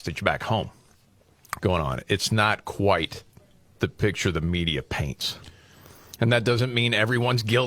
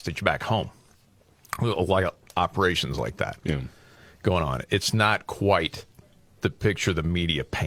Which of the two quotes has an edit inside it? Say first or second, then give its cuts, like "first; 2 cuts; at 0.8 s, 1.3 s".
first; 1 cut; at 1.6 s